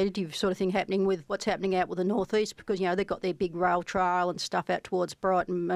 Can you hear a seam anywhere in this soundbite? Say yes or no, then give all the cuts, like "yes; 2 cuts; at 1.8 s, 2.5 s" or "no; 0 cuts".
no; 0 cuts